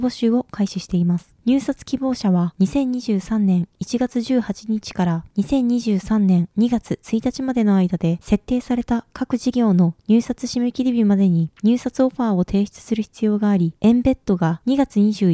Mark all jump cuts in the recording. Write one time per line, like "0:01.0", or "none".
0:01.4
0:13.8